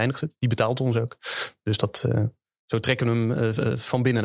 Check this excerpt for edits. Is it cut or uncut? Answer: uncut